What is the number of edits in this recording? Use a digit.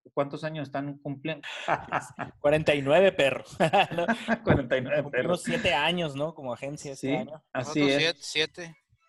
1